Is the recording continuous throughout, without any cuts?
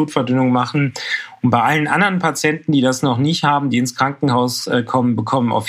yes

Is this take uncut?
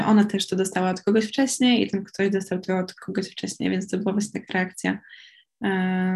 yes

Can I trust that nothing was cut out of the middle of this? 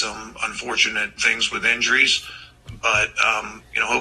no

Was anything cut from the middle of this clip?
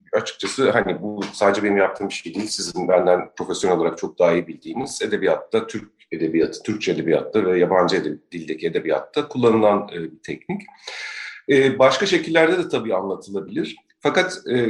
no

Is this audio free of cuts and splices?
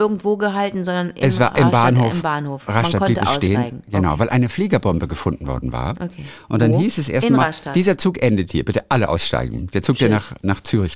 yes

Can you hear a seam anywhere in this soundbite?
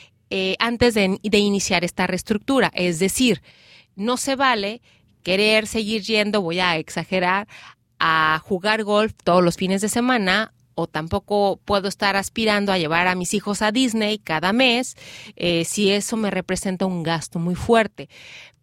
no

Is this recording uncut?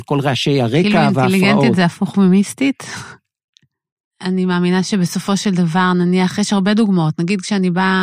no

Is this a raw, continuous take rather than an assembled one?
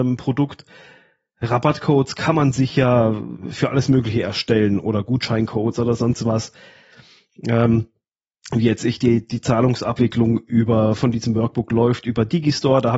yes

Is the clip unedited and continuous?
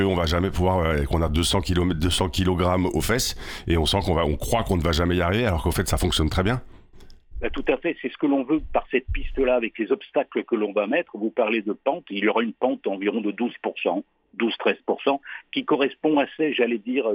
yes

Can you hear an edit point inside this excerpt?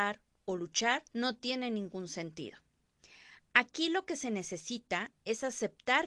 yes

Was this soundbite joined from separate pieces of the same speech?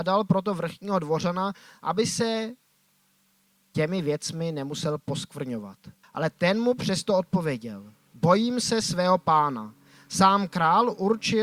yes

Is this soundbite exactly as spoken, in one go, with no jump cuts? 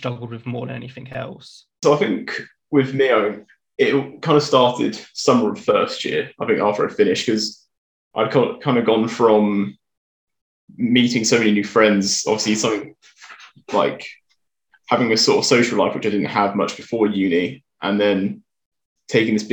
no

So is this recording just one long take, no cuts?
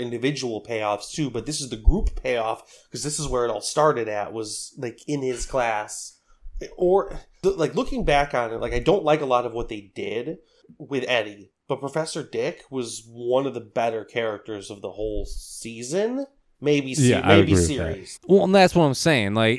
no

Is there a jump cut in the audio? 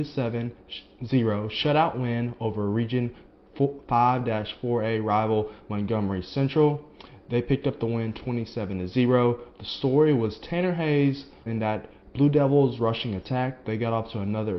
yes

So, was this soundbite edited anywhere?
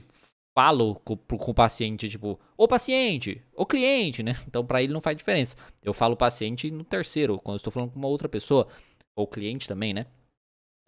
no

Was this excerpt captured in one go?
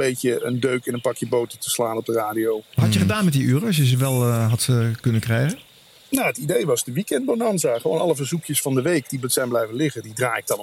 yes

